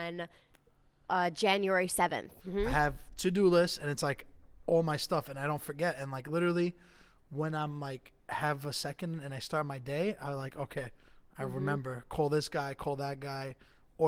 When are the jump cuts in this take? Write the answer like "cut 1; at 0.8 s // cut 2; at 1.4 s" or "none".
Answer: cut 1; at 2.4 s